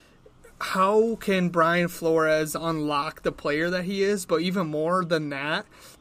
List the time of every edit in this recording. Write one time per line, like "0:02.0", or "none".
none